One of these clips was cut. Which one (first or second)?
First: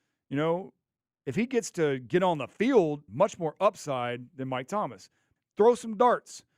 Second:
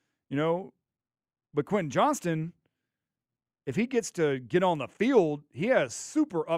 first